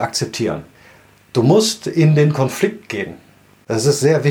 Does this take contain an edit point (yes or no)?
no